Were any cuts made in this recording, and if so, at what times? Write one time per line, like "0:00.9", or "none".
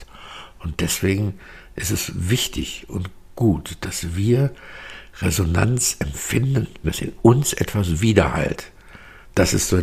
0:06.8